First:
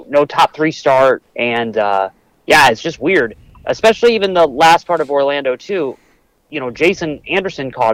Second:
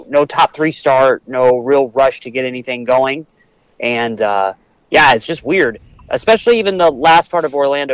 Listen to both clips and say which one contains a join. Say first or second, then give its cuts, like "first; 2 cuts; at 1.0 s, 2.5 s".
first; 1 cut; at 1.2 s